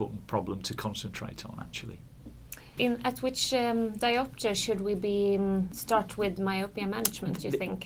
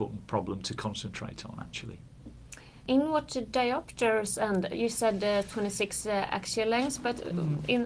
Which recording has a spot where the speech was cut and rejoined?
first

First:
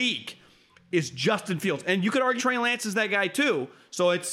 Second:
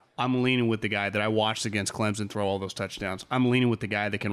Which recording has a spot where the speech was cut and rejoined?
first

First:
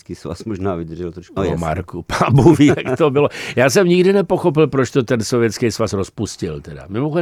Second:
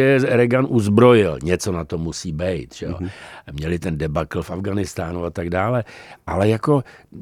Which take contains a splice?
first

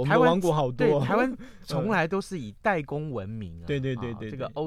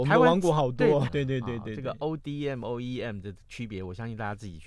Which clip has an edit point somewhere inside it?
second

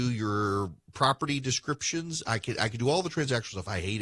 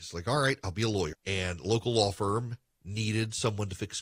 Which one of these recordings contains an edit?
second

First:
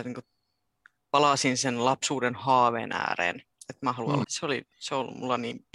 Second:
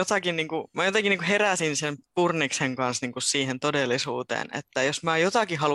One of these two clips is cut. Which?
first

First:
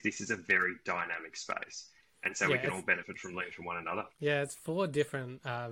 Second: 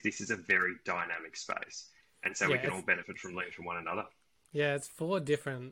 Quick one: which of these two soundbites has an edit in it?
first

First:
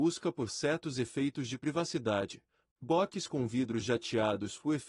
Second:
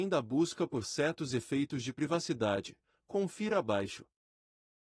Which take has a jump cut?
first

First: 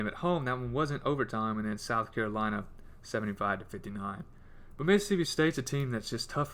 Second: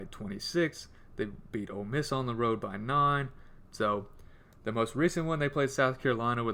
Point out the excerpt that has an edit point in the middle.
second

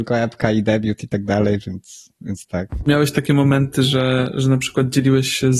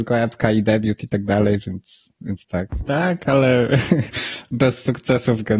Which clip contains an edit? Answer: second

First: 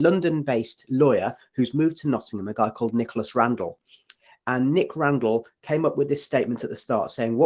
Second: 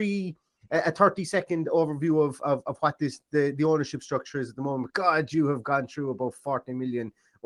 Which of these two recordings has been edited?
second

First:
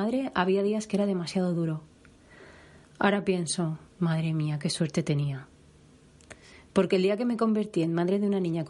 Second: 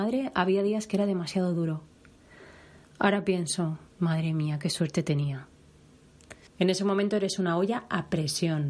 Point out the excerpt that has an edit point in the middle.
second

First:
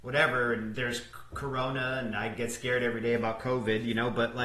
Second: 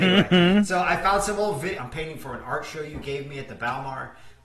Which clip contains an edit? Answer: second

